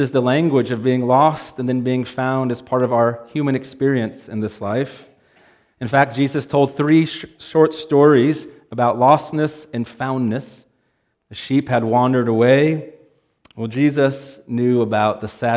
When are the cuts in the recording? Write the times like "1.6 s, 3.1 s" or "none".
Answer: 11.1 s, 13.5 s